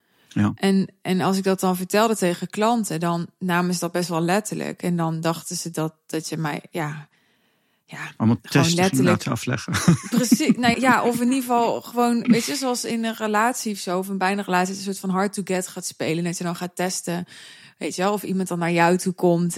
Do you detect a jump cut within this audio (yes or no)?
yes